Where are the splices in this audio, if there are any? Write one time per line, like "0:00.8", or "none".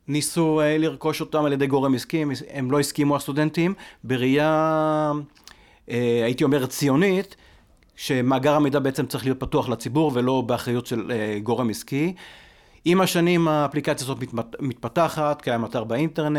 none